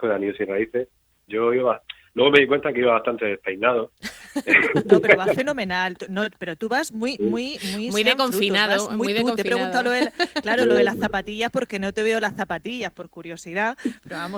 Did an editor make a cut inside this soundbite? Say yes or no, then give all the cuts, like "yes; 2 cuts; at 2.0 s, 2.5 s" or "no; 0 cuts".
yes; 1 cut; at 1.3 s